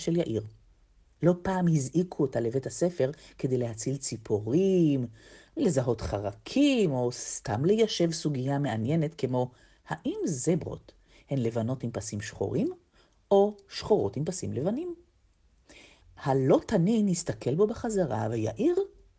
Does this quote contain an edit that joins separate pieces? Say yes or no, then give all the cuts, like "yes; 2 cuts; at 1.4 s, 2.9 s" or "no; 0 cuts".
yes; 1 cut; at 16.0 s